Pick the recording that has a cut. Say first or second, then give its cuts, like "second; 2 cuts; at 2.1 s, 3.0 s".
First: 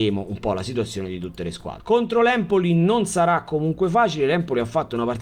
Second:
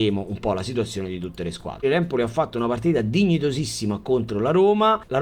second; 1 cut; at 1.8 s